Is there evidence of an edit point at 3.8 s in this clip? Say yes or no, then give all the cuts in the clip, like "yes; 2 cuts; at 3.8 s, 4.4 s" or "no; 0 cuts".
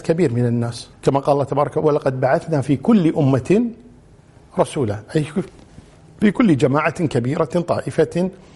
no; 1 cut; at 0.9 s